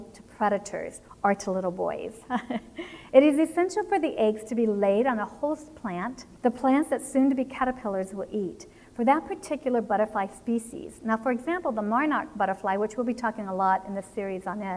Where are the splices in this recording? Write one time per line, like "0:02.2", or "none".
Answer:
0:06.4